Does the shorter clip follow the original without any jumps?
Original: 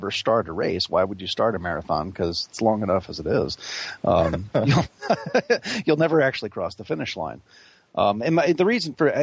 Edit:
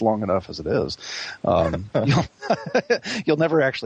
yes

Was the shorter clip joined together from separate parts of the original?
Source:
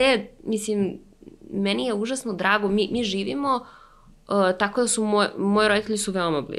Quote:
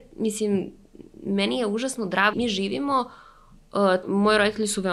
yes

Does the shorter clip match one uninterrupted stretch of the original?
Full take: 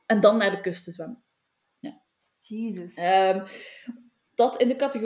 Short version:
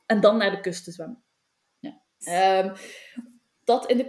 no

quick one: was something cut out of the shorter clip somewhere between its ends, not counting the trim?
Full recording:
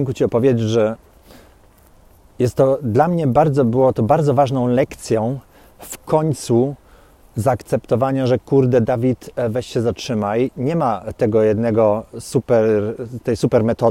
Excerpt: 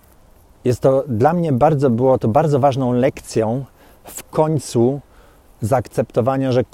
no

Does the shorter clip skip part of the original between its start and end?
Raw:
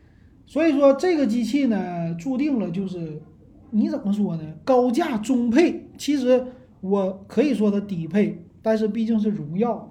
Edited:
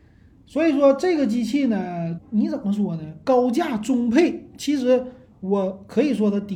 yes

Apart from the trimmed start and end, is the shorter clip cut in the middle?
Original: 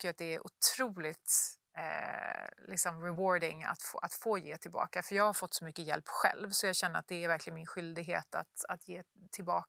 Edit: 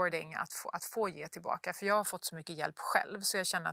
no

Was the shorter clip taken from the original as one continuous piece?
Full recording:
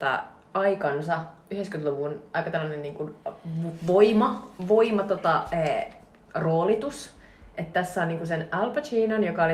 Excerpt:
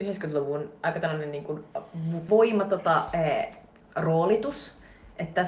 no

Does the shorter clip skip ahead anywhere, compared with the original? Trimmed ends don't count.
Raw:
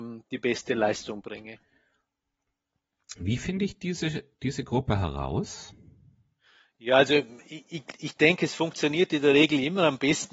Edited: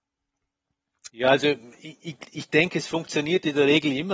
yes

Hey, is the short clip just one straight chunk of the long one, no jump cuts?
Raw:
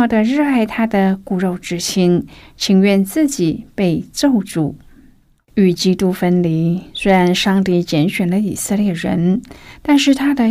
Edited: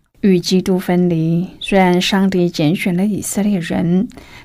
yes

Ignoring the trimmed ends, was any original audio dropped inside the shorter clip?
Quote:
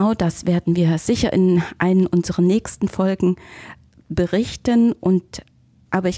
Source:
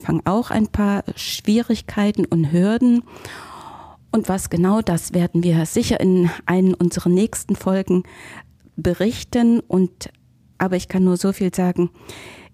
no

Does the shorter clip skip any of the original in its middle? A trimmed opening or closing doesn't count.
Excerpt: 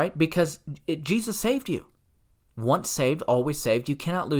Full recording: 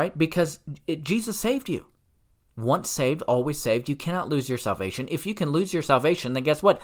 no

